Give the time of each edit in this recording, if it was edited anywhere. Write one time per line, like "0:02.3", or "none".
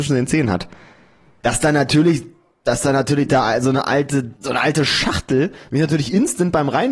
0:01.4
0:04.4